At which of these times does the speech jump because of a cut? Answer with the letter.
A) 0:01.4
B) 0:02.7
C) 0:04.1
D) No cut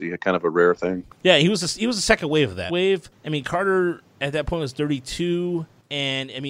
B